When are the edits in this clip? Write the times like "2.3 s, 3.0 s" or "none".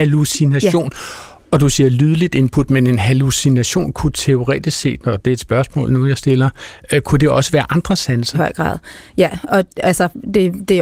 8.3 s